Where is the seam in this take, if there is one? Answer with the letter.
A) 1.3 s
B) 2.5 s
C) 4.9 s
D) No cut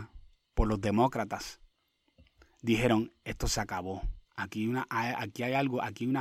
D